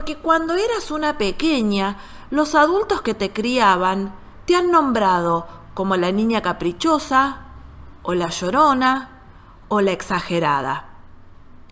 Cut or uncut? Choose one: uncut